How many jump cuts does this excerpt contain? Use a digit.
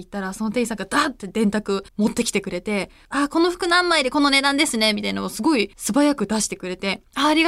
2